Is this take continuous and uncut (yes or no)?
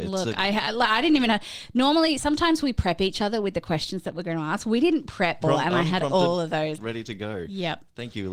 no